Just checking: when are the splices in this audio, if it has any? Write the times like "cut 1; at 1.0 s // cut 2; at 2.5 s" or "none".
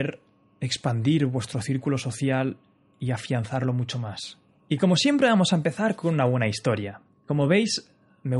cut 1; at 4.6 s